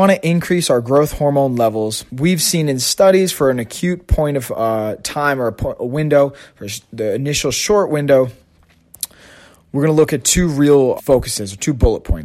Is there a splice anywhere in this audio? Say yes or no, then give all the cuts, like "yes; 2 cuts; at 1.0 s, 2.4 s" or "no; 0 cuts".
yes; 2 cuts; at 2.1 s, 11.0 s